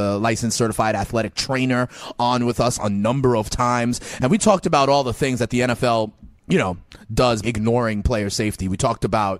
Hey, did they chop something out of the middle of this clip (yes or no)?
yes